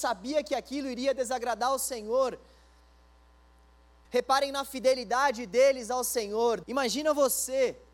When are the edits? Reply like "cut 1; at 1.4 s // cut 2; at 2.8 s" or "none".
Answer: cut 1; at 4.0 s // cut 2; at 6.6 s